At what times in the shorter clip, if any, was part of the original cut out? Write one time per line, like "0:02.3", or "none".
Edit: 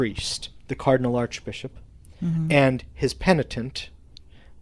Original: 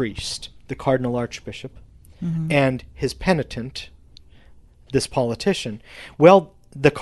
none